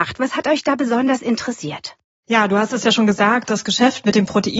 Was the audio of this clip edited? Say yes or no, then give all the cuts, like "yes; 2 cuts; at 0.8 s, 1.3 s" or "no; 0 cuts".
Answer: no; 0 cuts